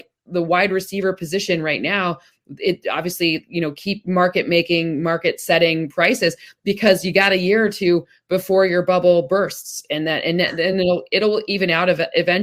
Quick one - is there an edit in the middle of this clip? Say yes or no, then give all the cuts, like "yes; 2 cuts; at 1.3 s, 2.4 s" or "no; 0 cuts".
no; 0 cuts